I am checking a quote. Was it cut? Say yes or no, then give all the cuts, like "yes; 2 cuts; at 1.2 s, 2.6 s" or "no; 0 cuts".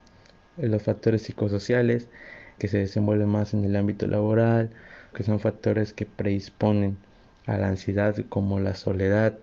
yes; 2 cuts; at 2.6 s, 5.1 s